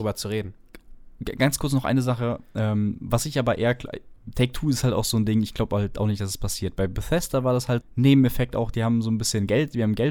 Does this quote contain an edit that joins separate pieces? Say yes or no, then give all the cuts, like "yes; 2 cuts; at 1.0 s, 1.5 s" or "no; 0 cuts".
yes; 1 cut; at 7.8 s